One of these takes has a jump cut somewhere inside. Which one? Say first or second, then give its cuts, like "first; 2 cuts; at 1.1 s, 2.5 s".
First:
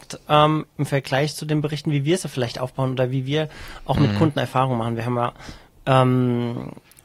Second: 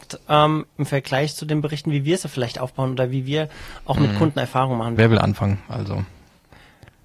second; 1 cut; at 5.0 s